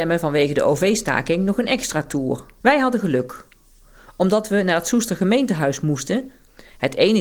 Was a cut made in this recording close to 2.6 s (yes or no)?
yes